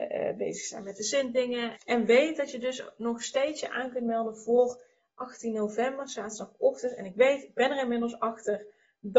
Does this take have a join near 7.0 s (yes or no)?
no